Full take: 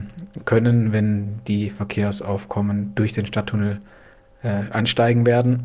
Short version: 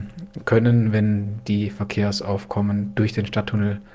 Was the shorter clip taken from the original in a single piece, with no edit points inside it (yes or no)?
yes